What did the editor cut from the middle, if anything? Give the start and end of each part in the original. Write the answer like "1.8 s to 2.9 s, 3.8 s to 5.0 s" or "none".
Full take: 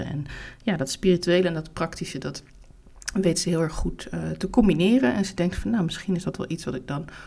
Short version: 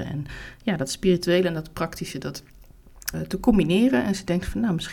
3.1 s to 4.2 s